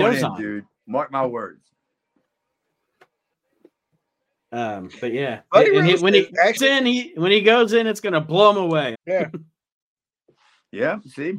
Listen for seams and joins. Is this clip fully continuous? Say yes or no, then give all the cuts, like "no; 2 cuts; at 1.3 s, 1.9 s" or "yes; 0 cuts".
no; 2 cuts; at 6.6 s, 8.9 s